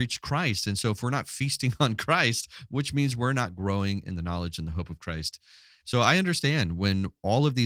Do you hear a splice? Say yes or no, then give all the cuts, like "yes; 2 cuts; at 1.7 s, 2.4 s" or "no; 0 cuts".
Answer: yes; 1 cut; at 5.8 s